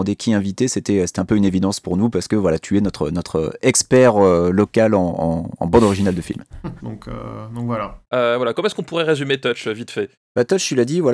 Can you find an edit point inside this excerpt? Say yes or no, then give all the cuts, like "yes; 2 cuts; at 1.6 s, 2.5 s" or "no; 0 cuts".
yes; 2 cuts; at 6.8 s, 8.1 s